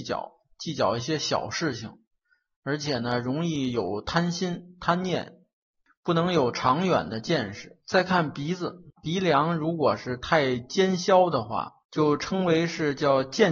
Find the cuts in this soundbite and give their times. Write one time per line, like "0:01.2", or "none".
0:07.8
0:08.9
0:11.8